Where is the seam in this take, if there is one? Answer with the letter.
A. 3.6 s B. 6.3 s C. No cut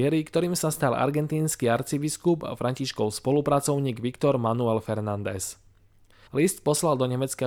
B